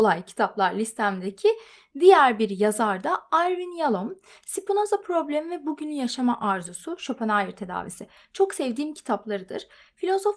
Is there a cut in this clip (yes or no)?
no